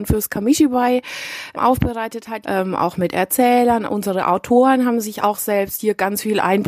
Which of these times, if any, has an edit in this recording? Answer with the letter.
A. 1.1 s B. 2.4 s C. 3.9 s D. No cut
B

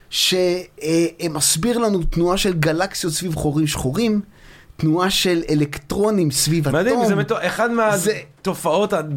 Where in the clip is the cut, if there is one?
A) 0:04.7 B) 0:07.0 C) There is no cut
C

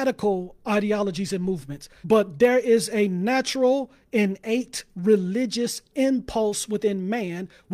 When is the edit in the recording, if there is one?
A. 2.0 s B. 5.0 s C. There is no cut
A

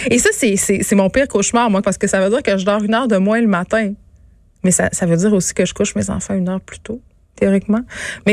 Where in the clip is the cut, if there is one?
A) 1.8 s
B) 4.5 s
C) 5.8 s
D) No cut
A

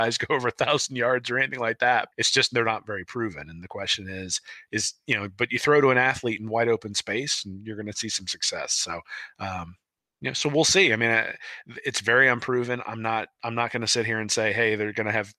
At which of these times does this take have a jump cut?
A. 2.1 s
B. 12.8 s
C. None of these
A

